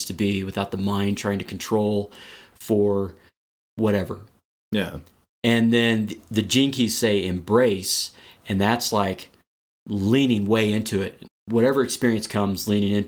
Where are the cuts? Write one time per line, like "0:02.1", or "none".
0:11.3